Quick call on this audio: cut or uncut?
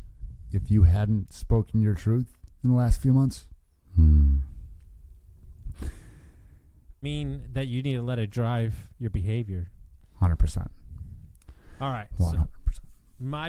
cut